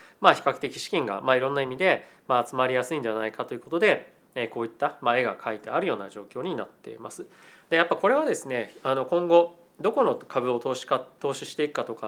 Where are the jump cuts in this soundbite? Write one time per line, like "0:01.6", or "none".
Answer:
none